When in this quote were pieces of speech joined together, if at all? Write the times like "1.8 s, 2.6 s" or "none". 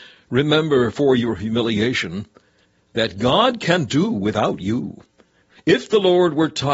5.5 s